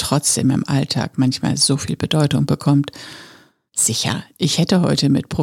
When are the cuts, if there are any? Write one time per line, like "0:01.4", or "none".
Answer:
0:03.7